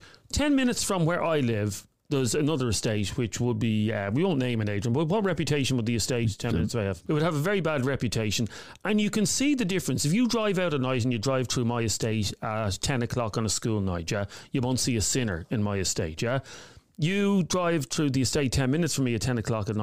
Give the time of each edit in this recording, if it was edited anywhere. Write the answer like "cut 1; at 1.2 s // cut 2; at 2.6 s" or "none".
cut 1; at 7.0 s